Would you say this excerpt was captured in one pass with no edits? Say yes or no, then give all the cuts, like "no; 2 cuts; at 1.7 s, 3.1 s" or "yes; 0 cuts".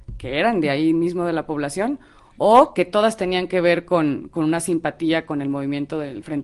yes; 0 cuts